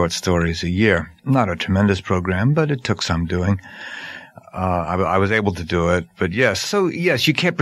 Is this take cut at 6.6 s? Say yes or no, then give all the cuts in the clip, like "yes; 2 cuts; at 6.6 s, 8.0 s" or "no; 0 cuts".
yes; 2 cuts; at 1.2 s, 6.6 s